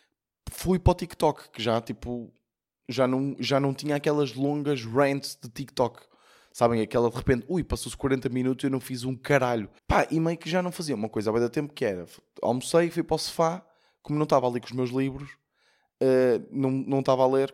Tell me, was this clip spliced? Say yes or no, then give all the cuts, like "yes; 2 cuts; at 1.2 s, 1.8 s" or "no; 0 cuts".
yes; 1 cut; at 9.8 s